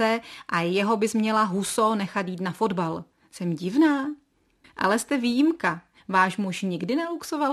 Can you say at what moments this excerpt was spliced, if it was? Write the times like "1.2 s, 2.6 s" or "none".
4.6 s, 6.0 s